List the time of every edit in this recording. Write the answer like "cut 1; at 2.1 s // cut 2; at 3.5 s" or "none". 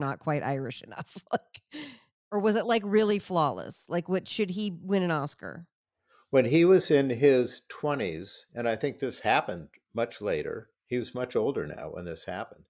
none